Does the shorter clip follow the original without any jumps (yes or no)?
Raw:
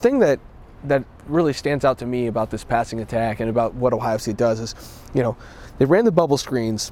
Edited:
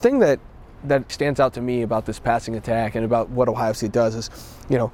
no